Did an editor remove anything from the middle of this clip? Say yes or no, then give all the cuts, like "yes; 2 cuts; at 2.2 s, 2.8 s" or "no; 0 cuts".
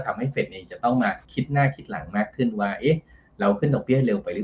yes; 1 cut; at 1.2 s